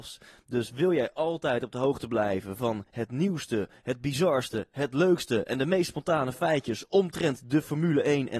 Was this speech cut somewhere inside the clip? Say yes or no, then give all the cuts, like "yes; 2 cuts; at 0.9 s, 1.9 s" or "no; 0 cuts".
no; 0 cuts